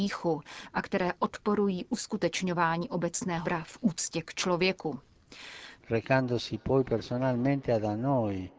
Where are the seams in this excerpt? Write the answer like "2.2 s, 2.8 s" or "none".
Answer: 3.4 s, 5.8 s

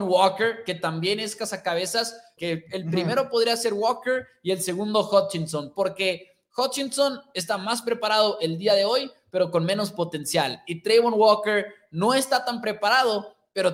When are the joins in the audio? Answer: 2.4 s

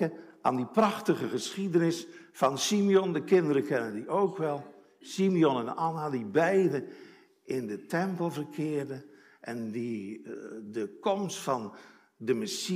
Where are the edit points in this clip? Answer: none

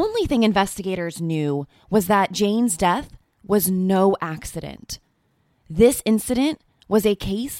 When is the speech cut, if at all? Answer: none

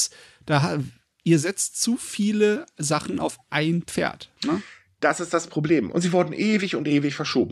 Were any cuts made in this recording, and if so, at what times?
5.9 s

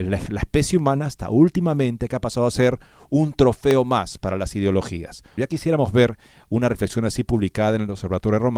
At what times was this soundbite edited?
5.4 s

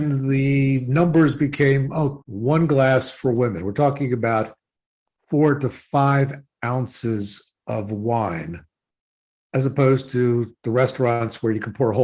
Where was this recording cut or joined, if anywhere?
2.2 s

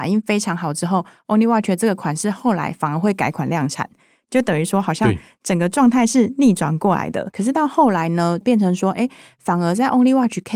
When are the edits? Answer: 7.3 s, 8.4 s

